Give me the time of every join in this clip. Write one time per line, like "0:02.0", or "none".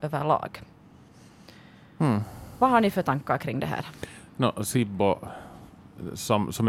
none